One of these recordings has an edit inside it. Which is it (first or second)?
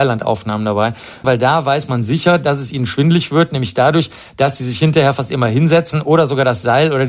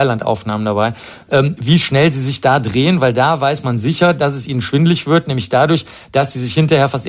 first